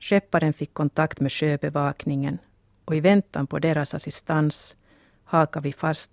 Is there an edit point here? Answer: no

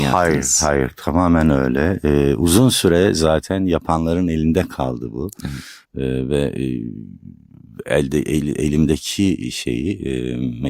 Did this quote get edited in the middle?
yes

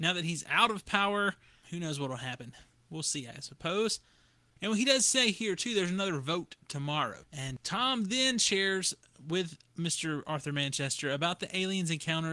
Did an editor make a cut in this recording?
yes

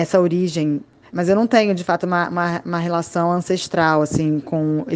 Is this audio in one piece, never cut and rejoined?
no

